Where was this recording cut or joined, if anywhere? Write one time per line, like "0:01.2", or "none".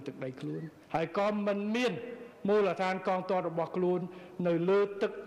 none